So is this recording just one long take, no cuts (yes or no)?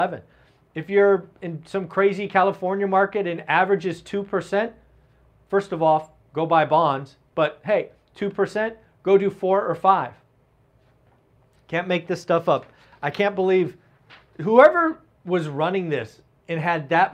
yes